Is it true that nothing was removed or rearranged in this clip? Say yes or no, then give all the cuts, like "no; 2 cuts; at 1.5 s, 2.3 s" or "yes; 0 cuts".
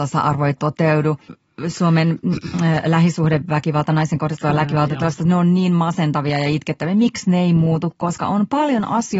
yes; 0 cuts